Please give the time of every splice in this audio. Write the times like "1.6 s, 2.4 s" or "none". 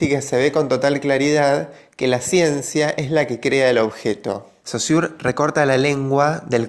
4.6 s